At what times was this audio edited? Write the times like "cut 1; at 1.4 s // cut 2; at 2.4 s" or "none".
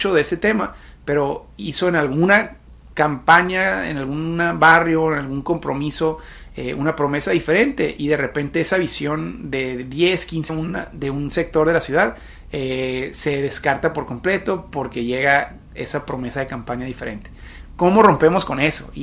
cut 1; at 2.9 s // cut 2; at 10.5 s

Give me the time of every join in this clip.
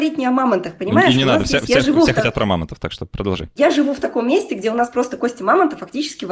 none

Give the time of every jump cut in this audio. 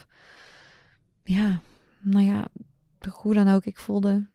none

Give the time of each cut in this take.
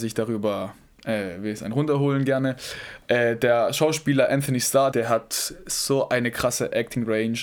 cut 1; at 4.9 s

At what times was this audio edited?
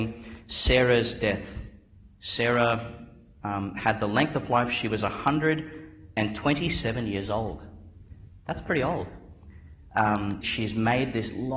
cut 1; at 10.4 s

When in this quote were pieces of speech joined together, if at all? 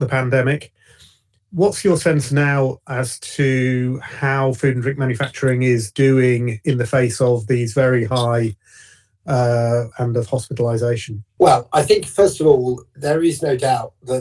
cut 1; at 9.9 s

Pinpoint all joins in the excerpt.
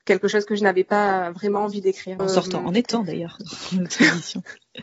cut 1; at 2.2 s

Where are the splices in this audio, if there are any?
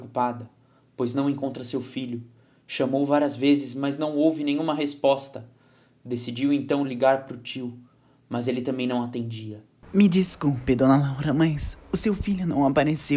cut 1; at 9.8 s

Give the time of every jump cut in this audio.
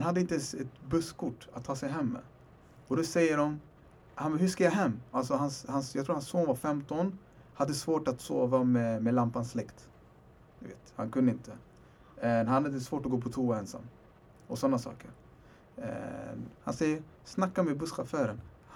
cut 1; at 5.1 s // cut 2; at 16.5 s

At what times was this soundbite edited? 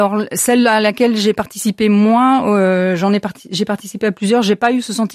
none

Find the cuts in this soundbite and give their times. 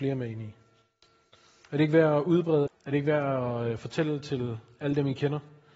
cut 1; at 2.7 s

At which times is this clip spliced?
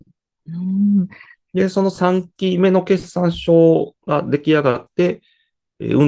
cut 1; at 1.3 s // cut 2; at 4.0 s

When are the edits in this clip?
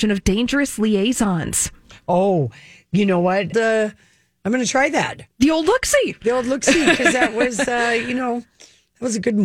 cut 1; at 3.5 s

